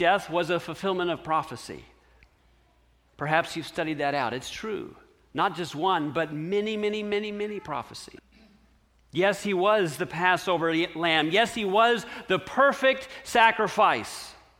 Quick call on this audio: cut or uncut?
uncut